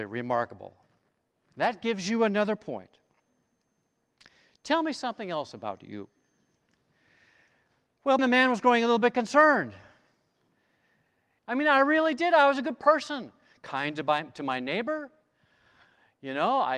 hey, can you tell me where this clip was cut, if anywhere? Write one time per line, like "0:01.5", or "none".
0:08.2
0:11.4